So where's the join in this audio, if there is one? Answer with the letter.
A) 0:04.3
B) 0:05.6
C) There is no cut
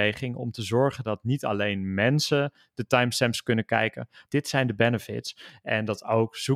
A